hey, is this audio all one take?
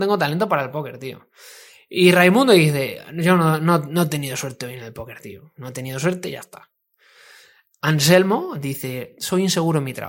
yes; 0 cuts

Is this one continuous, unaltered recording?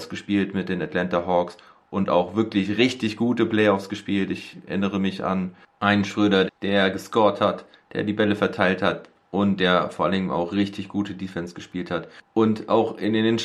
no; 1 cut; at 6.5 s

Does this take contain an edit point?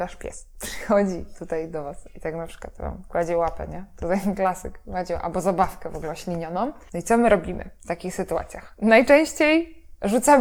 no; 0 cuts

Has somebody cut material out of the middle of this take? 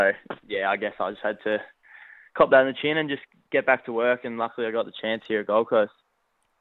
no; 0 cuts

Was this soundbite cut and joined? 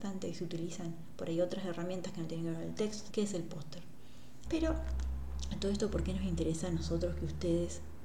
yes; 2 cuts; at 3.1 s, 4.4 s

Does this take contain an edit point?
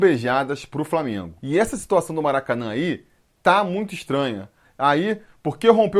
yes; 2 cuts; at 1.4 s, 4.6 s

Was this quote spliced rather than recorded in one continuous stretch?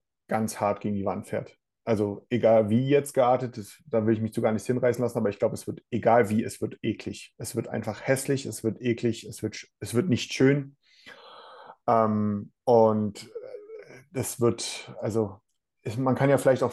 no; 0 cuts

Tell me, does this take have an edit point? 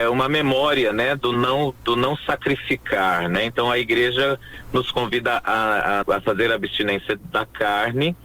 yes; 1 cut; at 6.0 s

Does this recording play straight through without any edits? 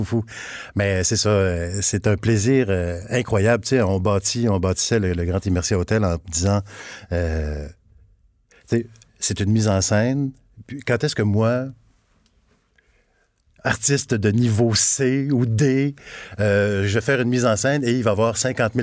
yes; 0 cuts

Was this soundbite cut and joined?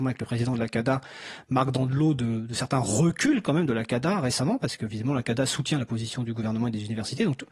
no; 0 cuts

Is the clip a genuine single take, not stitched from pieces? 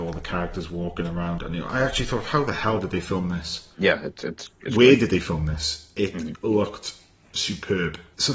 no; 1 cut; at 3.7 s

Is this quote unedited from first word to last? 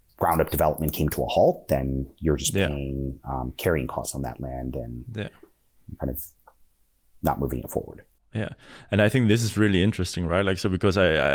yes; 0 cuts

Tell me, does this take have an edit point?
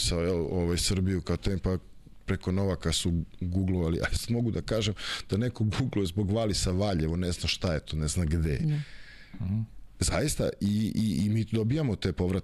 no; 0 cuts

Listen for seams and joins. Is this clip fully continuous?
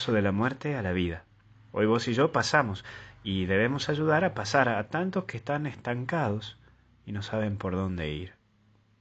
yes; 0 cuts

